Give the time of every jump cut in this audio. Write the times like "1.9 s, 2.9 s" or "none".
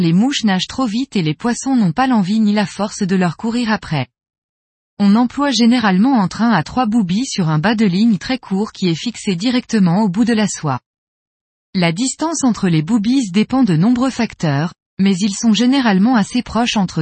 4.8 s